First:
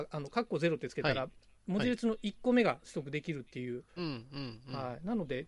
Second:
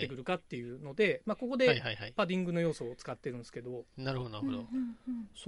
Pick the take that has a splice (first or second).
first